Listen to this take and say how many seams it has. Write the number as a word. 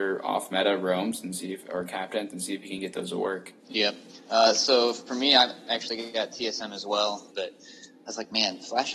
two